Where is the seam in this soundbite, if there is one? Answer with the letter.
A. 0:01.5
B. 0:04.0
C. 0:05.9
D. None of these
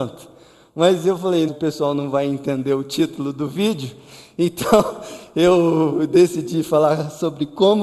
A